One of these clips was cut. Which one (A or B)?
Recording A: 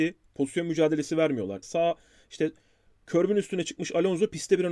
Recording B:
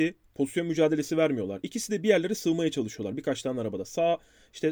A